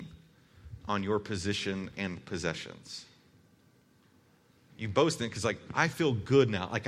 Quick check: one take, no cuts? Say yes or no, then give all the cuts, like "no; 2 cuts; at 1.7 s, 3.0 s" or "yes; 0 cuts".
yes; 0 cuts